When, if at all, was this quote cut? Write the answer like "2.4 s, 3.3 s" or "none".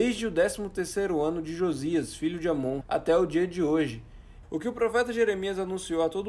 2.8 s, 4.4 s